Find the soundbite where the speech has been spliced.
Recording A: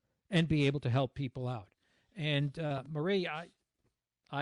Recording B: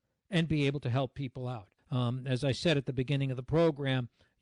B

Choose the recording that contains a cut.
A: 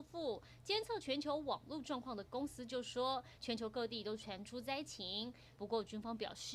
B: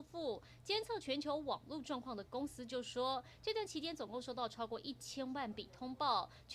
A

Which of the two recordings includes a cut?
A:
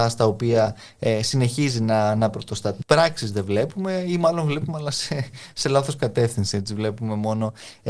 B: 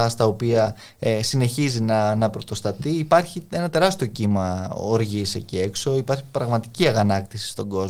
A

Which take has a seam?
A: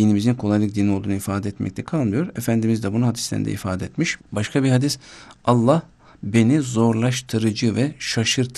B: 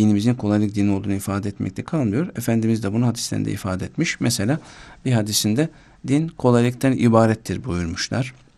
A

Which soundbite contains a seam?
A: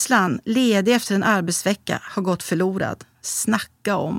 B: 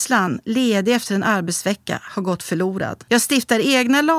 B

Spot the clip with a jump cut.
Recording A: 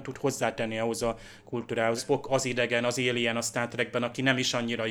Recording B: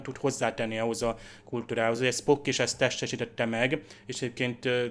A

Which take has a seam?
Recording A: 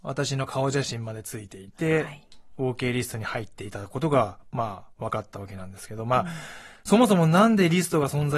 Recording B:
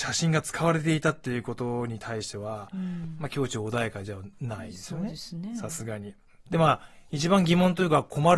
B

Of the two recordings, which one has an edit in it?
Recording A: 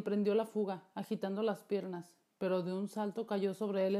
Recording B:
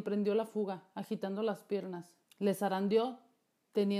B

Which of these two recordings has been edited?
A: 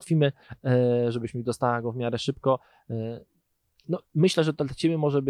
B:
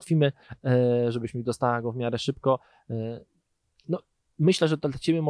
A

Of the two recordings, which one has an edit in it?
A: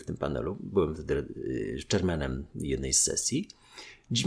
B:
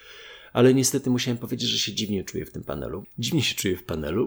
B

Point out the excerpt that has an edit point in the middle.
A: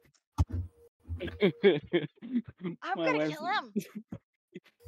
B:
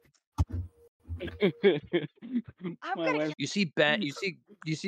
B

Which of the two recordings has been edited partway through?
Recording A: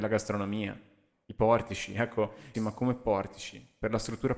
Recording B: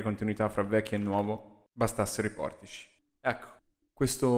A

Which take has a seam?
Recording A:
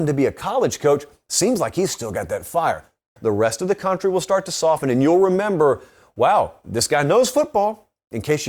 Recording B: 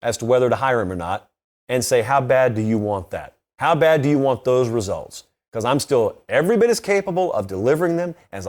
A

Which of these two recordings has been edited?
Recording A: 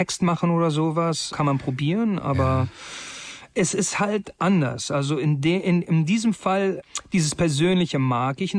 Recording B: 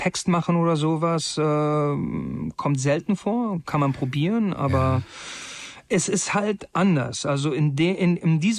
A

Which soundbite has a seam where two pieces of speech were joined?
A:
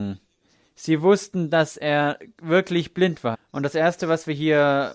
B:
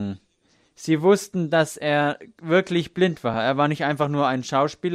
A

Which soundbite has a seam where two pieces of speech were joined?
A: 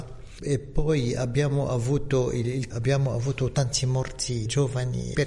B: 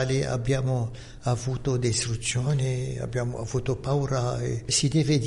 A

